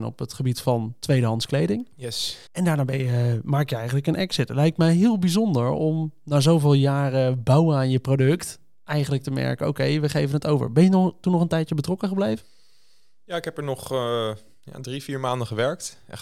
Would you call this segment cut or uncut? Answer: cut